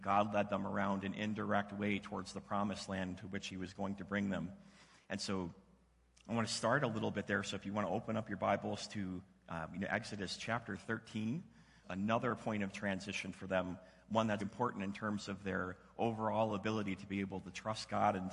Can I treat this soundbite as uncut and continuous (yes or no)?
no